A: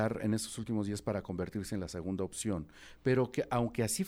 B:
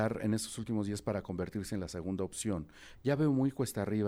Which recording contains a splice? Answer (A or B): B